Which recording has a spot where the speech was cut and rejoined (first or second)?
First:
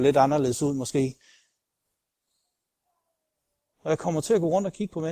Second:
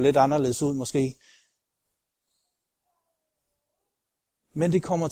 first